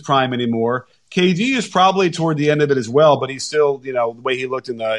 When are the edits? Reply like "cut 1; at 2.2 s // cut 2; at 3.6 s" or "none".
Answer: none